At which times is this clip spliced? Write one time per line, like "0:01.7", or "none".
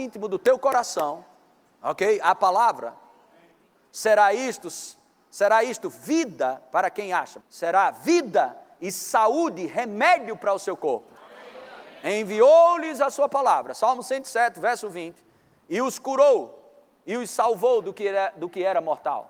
0:07.4